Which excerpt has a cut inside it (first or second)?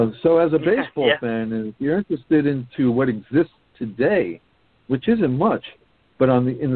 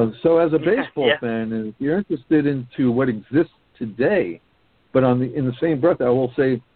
second